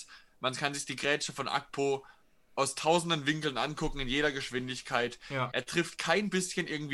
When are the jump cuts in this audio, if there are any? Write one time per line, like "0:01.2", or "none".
0:05.5